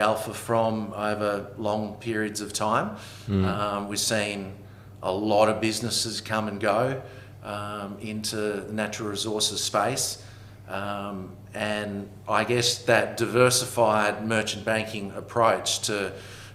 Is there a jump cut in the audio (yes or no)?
no